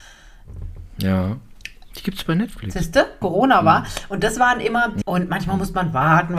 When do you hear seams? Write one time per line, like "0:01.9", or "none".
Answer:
0:03.2
0:05.0